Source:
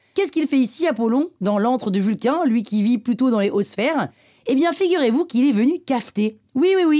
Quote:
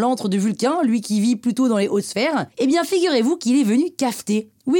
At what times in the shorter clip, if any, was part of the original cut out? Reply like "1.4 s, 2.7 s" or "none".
2.5 s